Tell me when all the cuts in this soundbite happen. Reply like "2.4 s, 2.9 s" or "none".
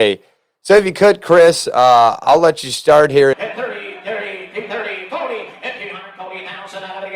3.3 s